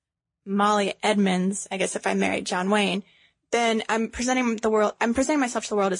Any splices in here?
no; 0 cuts

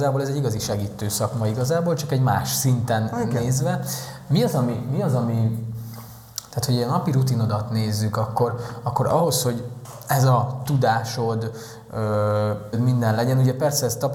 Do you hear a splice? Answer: yes; 1 cut; at 12.7 s

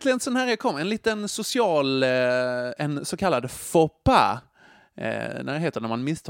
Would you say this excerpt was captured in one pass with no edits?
yes; 0 cuts

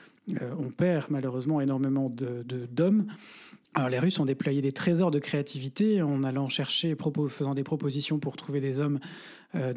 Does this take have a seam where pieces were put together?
yes; 1 cut; at 3.6 s

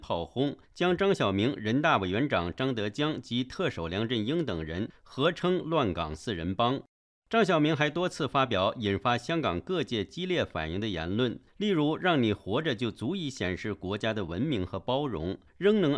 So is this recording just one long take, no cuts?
yes; 0 cuts

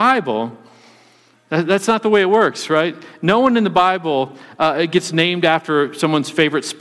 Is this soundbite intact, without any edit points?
yes; 0 cuts

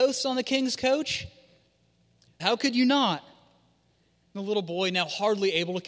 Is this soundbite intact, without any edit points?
no; 1 cut; at 2.4 s

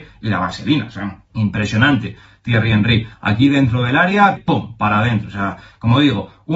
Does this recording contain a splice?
yes; 2 cuts; at 1.2 s, 4.4 s

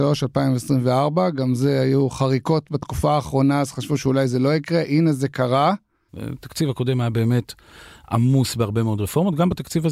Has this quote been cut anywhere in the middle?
yes; 1 cut; at 6.1 s

